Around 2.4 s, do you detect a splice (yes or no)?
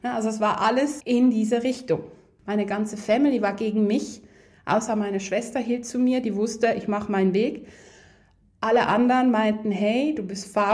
yes